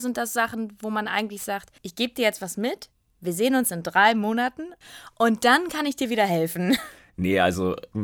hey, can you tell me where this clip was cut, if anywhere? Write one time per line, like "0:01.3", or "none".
0:01.8

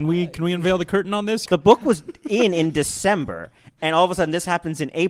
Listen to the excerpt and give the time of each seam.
0:01.5

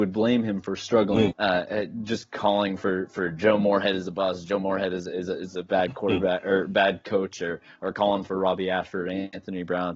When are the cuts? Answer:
0:01.3

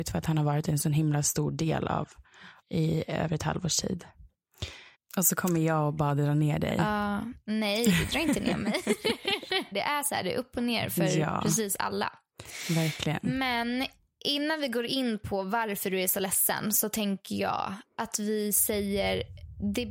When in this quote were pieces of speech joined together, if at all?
0:02.6
0:04.9
0:09.7

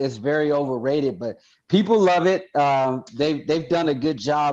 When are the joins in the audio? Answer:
none

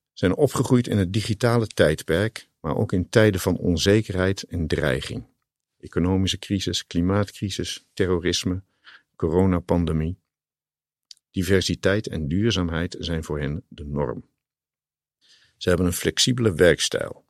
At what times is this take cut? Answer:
0:11.2

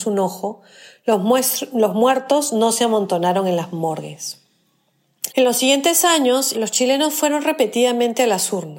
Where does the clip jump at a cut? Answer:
0:05.3
0:06.5

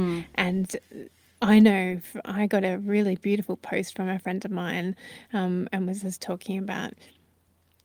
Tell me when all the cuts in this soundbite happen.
none

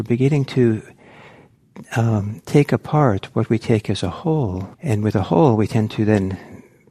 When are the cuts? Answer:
0:04.7

